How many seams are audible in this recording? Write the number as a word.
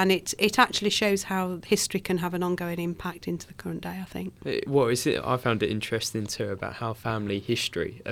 zero